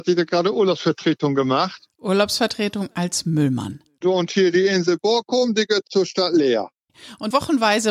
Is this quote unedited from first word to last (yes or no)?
no